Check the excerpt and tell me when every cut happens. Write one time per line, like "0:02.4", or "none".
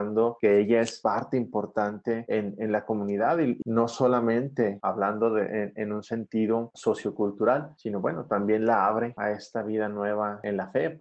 0:03.6